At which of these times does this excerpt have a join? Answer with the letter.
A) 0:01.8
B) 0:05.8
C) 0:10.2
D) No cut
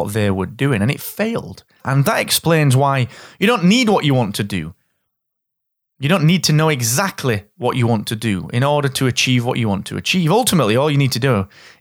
A